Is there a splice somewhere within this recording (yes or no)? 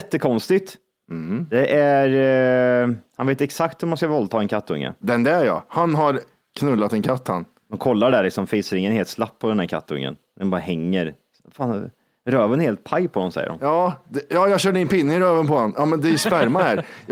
no